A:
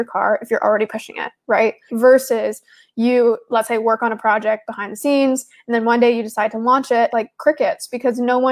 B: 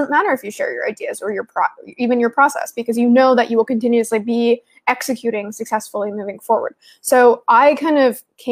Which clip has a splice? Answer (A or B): A